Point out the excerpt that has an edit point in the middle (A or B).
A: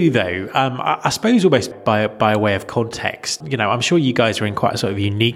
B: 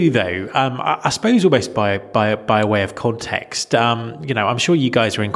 A